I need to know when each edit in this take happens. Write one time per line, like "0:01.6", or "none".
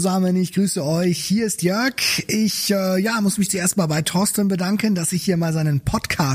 none